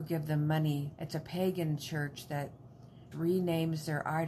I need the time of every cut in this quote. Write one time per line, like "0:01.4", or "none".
0:01.0
0:03.1

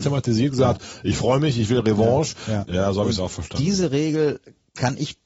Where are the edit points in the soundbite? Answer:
0:02.6

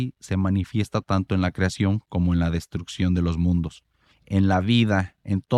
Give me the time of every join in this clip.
0:04.1

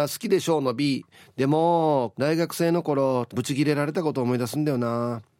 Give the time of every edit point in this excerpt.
0:02.1
0:03.3

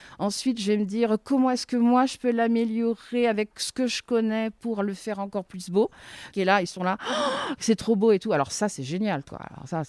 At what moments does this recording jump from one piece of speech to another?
0:06.3

